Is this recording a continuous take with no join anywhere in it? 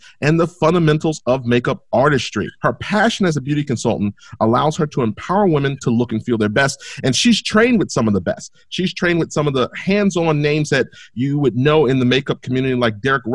no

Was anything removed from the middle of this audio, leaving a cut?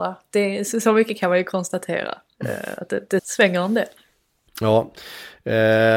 yes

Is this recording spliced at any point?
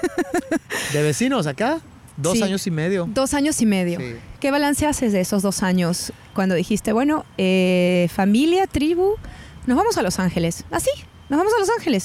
no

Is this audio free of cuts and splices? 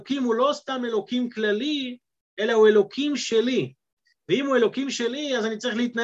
yes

